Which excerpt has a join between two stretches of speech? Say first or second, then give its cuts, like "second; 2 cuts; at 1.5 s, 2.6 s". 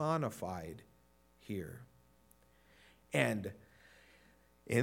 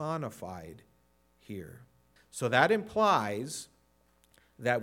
second; 1 cut; at 2.2 s